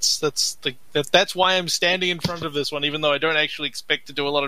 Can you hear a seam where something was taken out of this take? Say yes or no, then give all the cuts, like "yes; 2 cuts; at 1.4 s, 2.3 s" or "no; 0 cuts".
no; 0 cuts